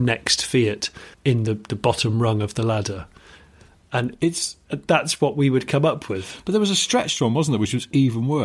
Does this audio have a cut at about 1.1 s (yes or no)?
yes